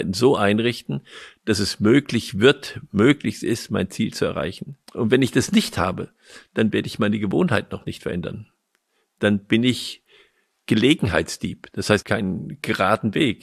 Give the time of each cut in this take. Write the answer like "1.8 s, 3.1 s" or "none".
4.8 s, 12.0 s